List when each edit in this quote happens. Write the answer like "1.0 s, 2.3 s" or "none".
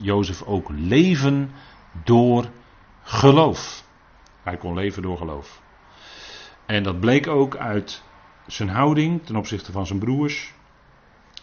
none